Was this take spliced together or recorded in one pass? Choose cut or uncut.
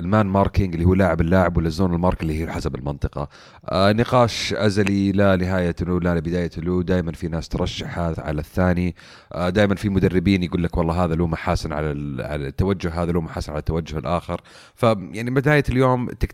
cut